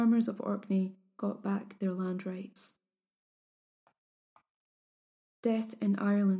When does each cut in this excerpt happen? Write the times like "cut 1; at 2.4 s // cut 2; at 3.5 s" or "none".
none